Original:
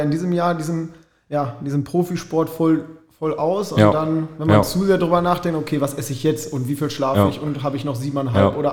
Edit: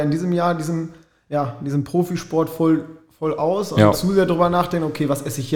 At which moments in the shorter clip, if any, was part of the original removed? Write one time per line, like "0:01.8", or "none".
0:03.9

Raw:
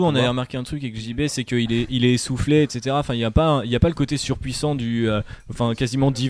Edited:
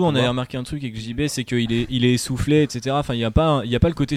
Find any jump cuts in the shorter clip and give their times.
none

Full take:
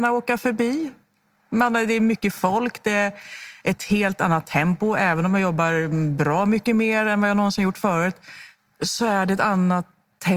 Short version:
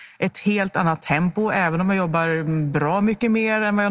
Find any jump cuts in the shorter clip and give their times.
none

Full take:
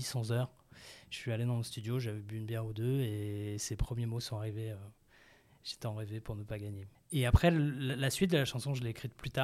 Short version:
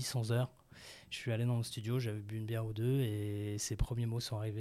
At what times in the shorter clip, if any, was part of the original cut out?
none

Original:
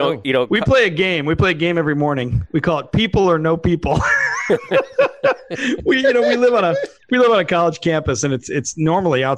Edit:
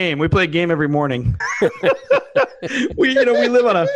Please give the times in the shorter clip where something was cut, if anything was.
0:01.4

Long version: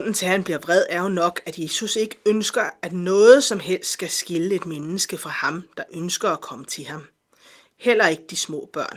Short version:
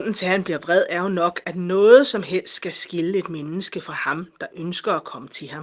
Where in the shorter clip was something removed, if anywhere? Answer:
0:01.4

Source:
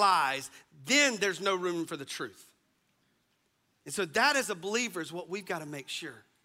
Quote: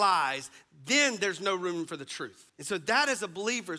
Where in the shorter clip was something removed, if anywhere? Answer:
0:02.5

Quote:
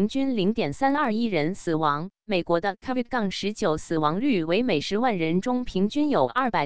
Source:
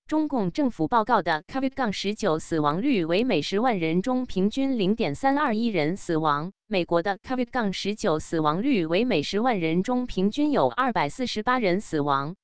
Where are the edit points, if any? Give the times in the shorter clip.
none

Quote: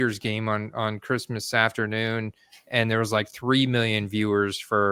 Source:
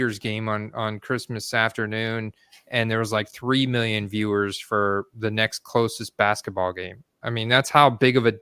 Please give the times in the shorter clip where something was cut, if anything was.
none

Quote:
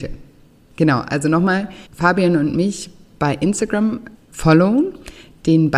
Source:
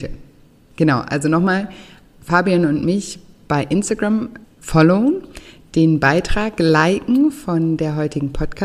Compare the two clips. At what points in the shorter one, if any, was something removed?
0:01.9

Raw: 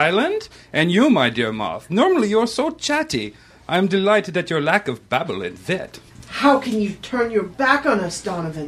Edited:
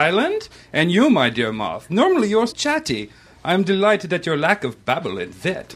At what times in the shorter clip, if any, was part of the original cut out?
0:02.5

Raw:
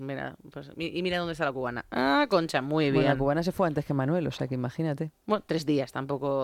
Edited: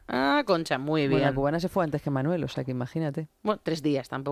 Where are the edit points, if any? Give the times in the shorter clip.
none

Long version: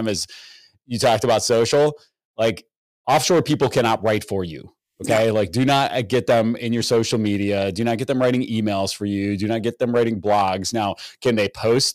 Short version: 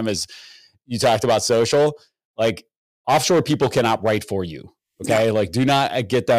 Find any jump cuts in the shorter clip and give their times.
none

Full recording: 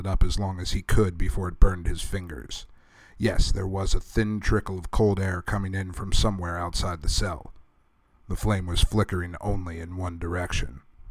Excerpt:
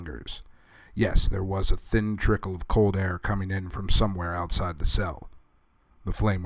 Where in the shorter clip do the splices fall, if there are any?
none

